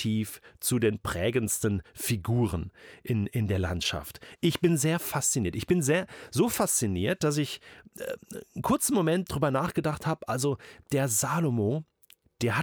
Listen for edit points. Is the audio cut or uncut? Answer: uncut